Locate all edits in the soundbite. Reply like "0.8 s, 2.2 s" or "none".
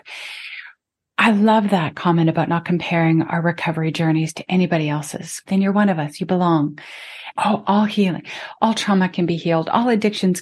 5.4 s, 7.3 s